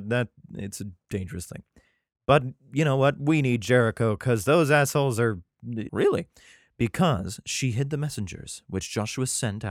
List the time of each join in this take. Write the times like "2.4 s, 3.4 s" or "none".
5.9 s